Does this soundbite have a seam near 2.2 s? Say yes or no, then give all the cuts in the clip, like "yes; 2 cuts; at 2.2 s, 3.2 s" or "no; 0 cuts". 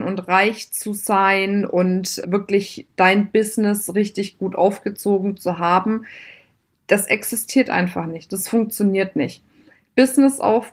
yes; 1 cut; at 2.2 s